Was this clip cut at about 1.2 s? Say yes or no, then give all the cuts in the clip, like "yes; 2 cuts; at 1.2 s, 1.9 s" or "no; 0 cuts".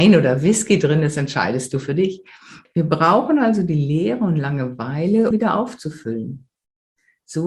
no; 2 cuts; at 2.6 s, 5.3 s